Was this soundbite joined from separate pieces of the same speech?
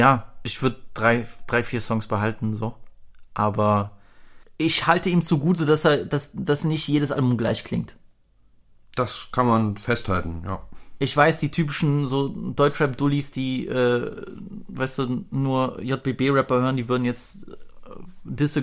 no; 0 cuts

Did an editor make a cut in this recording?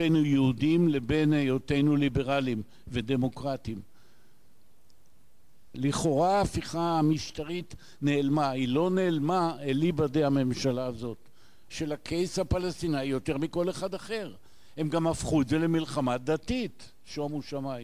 yes; 2 cuts; at 5.7 s, 11.7 s

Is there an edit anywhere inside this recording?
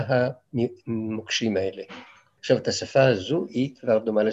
yes; 1 cut; at 2.4 s

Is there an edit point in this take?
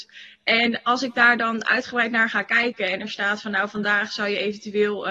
no; 0 cuts

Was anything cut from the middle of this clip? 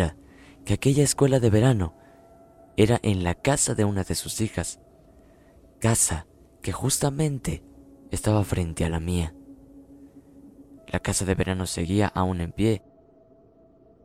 yes; 1 cut; at 10.8 s

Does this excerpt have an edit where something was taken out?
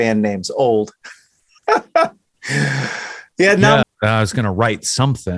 yes; 1 cut; at 3.8 s

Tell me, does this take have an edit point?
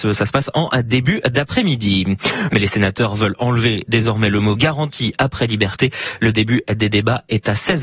yes; 1 cut; at 2.5 s

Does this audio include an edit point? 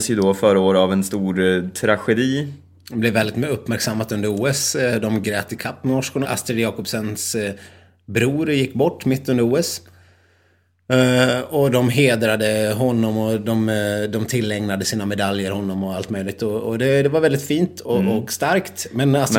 yes; 1 cut; at 6.2 s

